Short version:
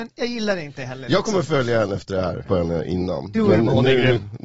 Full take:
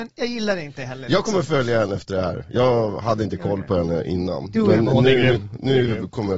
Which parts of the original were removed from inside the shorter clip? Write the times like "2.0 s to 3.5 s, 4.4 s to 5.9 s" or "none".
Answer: 2.5 s to 3.7 s